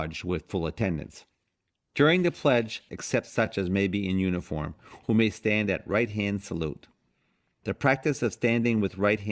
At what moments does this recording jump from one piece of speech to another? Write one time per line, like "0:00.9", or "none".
0:01.7
0:02.9